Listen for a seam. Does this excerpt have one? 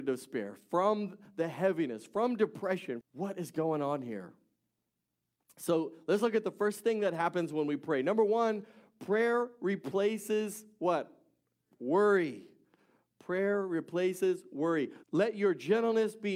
yes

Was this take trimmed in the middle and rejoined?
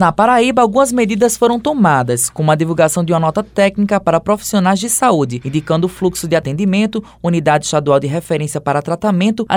no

